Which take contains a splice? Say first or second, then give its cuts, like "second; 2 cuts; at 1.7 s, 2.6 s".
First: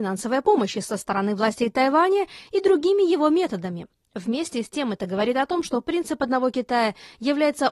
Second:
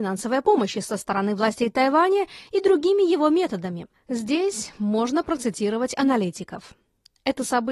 second; 1 cut; at 3.9 s